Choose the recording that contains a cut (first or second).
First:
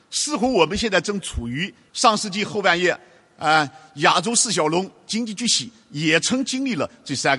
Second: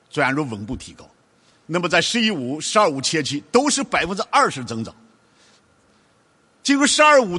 first